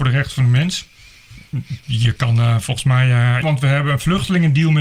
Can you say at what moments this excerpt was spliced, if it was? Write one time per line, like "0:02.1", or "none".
0:01.8
0:03.4